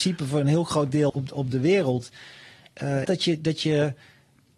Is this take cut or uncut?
cut